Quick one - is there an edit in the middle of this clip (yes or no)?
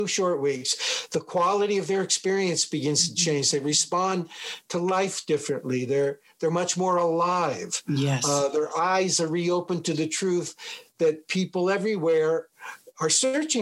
no